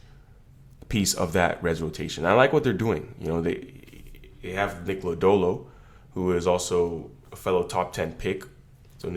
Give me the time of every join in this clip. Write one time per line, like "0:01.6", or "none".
none